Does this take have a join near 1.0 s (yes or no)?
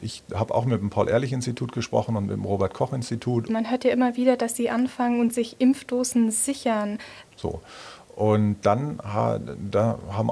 no